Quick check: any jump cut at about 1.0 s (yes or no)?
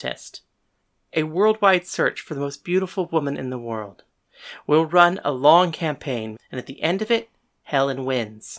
no